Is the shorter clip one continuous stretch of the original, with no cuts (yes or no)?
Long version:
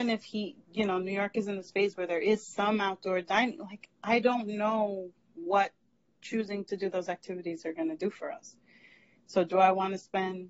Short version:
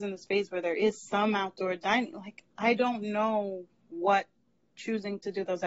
yes